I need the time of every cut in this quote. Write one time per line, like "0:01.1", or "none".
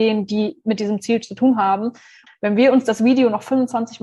0:02.3